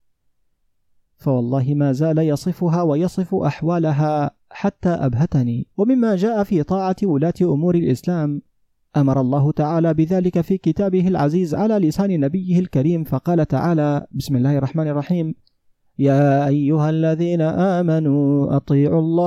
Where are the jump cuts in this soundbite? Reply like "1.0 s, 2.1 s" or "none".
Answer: 1.1 s, 5.7 s